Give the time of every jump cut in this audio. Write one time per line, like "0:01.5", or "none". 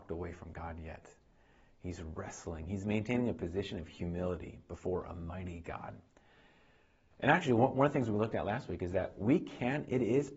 none